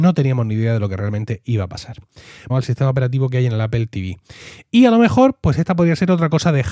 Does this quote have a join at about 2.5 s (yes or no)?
yes